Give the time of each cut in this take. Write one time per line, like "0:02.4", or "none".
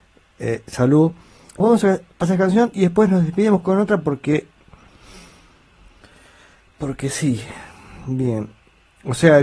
0:01.6